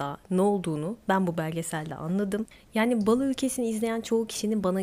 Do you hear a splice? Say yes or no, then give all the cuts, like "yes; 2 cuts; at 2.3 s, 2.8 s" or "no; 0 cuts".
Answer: no; 0 cuts